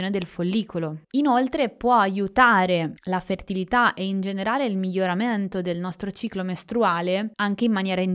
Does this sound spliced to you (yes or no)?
yes